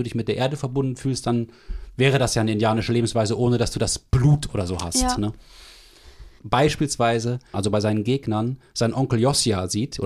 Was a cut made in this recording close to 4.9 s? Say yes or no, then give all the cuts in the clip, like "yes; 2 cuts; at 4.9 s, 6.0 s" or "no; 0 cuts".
no; 2 cuts; at 6.4 s, 7.5 s